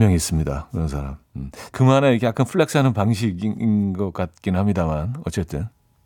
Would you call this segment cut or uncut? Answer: cut